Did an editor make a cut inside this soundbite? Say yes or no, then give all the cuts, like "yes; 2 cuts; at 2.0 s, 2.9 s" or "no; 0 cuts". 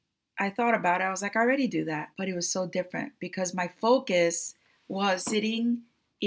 yes; 2 cuts; at 2.1 s, 5.2 s